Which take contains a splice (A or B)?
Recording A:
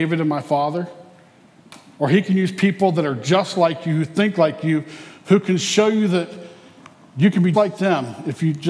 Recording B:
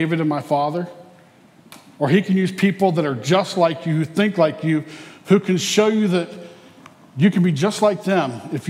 A